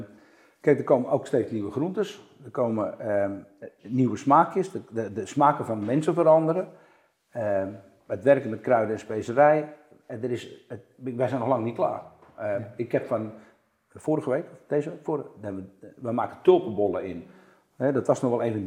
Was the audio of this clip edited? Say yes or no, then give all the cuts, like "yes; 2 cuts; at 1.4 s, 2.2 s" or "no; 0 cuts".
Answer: no; 0 cuts